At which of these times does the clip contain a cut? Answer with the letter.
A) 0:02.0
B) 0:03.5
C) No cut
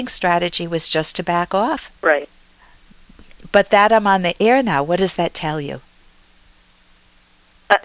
A